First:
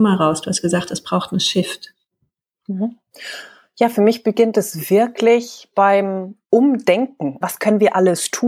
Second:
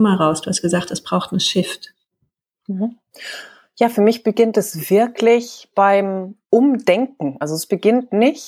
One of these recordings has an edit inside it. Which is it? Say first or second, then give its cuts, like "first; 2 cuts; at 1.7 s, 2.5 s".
first; 1 cut; at 7.4 s